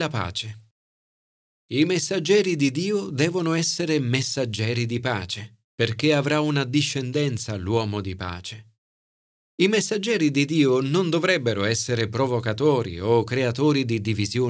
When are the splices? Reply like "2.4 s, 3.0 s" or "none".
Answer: 5.6 s